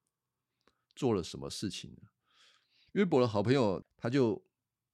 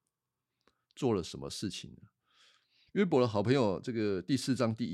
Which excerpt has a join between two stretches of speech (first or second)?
first